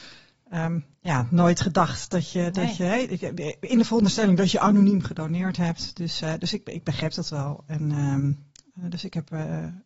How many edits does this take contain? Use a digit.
0